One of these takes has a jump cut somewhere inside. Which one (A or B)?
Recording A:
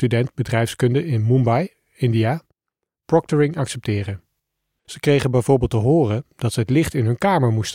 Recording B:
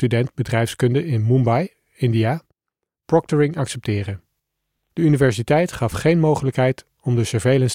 A